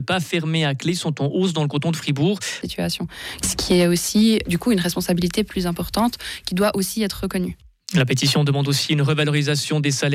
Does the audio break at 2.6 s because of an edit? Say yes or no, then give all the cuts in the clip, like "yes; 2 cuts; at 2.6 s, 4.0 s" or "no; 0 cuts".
yes; 1 cut; at 2.6 s